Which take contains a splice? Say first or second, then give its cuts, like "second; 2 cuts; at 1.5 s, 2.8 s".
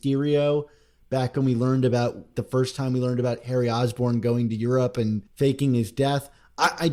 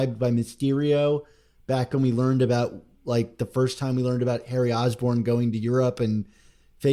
first; 2 cuts; at 2.3 s, 5.3 s